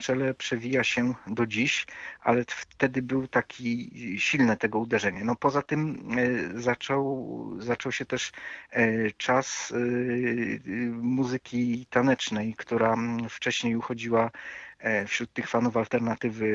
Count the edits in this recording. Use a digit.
0